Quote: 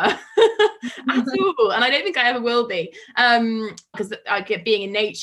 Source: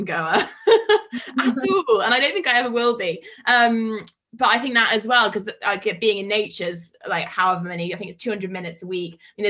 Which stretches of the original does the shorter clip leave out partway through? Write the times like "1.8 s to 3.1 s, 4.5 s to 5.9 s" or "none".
4.2 s to 5.3 s

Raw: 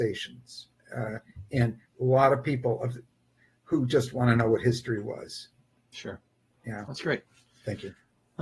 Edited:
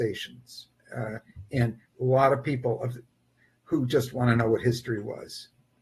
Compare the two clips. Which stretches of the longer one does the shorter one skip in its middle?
none

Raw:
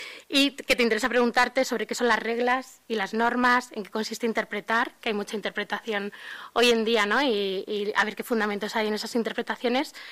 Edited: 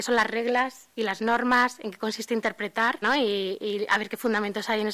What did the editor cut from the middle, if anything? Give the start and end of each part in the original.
4.9 s to 7.1 s

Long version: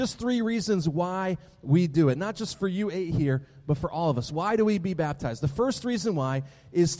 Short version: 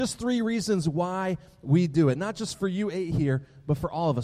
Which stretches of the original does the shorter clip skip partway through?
none

